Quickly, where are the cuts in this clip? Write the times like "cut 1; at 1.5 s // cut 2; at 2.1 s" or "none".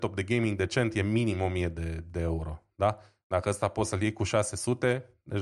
none